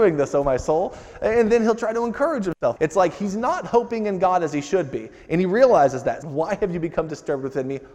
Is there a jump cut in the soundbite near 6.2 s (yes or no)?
yes